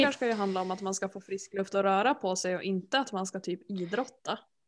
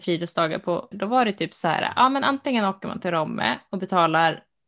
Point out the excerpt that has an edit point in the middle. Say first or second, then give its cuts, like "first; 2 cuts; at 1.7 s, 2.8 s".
second; 1 cut; at 0.9 s